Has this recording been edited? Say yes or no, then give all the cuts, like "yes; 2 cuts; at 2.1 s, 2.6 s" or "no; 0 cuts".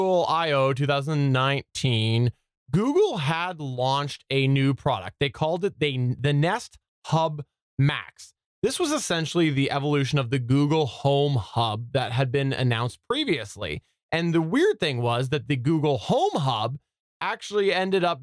no; 0 cuts